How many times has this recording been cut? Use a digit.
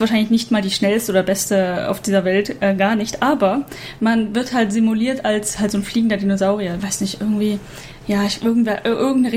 1